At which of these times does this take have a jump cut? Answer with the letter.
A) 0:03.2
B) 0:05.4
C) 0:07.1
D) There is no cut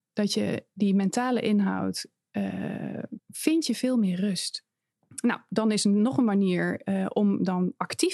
A